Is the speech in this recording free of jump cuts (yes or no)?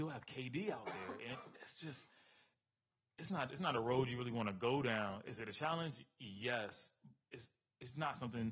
yes